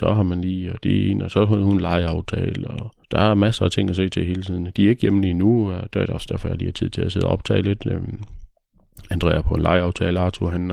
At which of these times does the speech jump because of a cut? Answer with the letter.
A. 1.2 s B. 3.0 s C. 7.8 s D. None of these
B